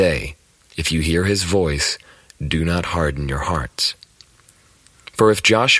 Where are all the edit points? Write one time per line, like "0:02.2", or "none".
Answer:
none

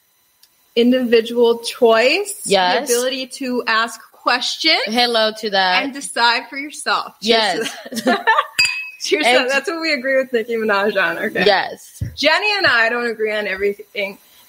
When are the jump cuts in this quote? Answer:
none

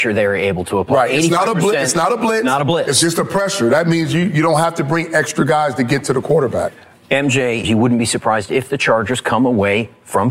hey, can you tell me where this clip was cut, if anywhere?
0:07.6

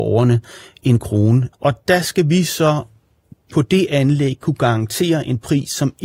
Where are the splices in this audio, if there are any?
0:01.5

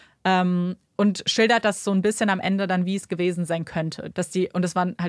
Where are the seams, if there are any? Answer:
0:04.1

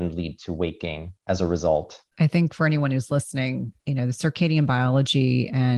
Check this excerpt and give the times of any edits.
0:02.1

